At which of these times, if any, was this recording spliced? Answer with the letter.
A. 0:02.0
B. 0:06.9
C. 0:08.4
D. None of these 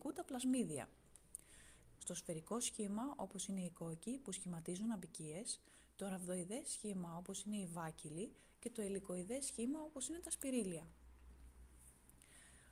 A